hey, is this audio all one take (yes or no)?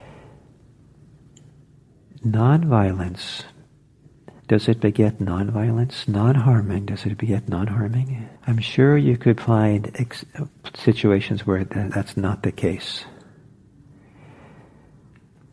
no